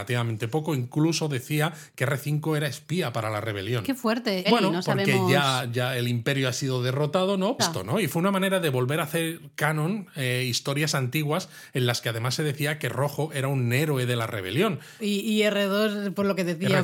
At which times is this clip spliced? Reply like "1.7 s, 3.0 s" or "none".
4.4 s, 7.6 s, 15.0 s